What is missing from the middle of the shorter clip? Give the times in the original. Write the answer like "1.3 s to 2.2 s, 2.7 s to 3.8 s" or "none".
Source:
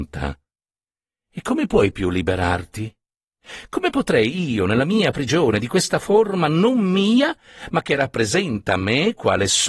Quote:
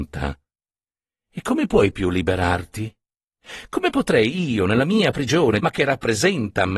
5.6 s to 7.7 s